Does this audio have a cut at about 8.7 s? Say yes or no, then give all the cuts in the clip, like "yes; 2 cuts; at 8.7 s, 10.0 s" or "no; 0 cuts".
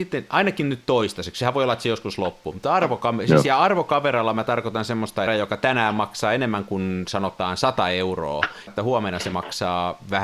yes; 2 cuts; at 5.3 s, 8.7 s